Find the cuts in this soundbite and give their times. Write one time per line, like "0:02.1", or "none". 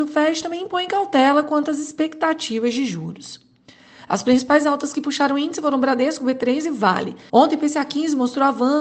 0:04.0
0:07.3

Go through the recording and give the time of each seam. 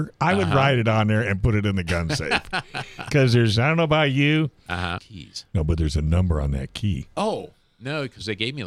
0:03.6
0:05.0

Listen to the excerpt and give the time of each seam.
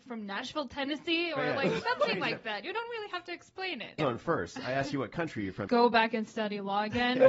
0:04.0
0:05.7

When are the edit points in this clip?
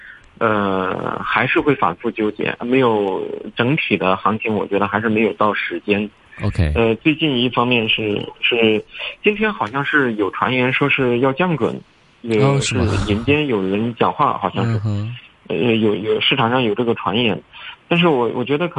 none

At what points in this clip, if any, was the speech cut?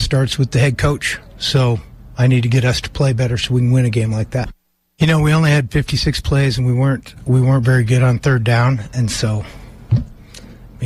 none

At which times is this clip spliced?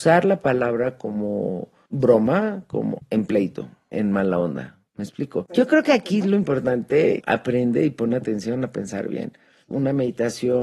0:03.0

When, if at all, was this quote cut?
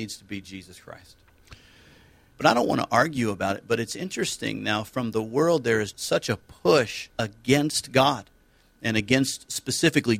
0:02.3
0:05.9
0:07.1

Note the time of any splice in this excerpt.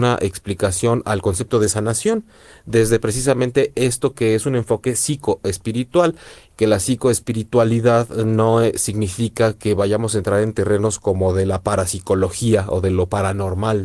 none

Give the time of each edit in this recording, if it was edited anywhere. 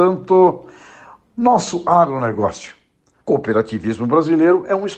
0:03.2

